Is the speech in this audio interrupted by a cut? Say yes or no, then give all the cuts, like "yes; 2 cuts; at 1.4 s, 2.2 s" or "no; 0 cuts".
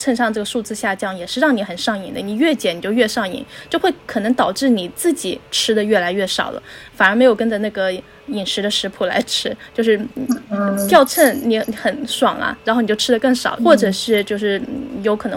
yes; 1 cut; at 13.6 s